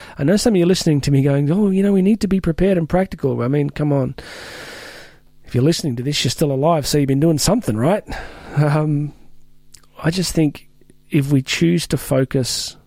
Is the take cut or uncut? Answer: uncut